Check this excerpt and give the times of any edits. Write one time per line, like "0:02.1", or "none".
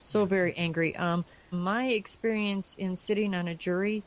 0:01.5